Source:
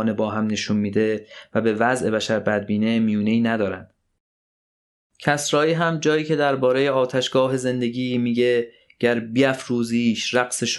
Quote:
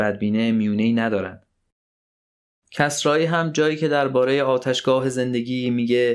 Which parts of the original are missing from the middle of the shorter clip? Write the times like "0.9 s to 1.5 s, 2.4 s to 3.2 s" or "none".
none